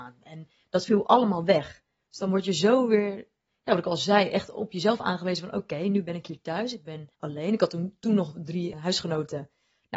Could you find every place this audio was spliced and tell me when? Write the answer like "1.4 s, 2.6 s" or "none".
7.1 s, 8.7 s